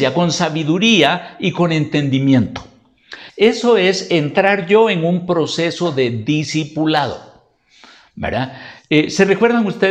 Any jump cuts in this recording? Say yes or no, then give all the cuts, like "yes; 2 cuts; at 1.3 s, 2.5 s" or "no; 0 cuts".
yes; 1 cut; at 3.3 s